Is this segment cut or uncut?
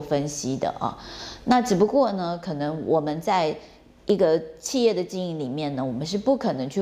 uncut